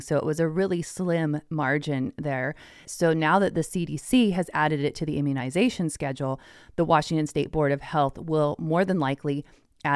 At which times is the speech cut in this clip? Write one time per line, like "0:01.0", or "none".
0:02.8